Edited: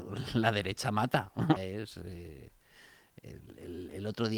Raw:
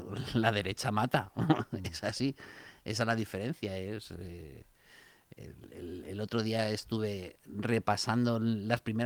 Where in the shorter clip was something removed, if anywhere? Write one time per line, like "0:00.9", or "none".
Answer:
0:01.6